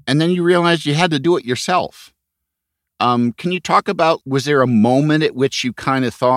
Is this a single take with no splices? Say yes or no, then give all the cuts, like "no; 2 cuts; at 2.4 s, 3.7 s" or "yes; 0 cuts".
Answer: no; 1 cut; at 4.2 s